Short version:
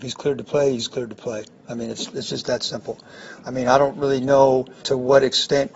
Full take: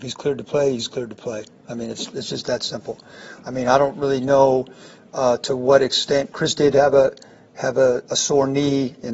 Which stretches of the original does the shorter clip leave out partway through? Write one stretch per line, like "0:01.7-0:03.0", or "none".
0:04.8-0:05.4